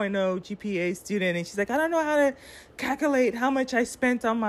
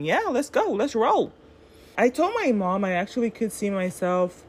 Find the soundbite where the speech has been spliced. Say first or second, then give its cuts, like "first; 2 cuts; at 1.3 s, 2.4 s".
second; 1 cut; at 1.9 s